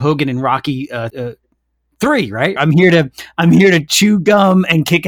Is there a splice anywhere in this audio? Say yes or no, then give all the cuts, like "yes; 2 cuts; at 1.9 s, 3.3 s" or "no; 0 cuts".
yes; 2 cuts; at 1.1 s, 2.6 s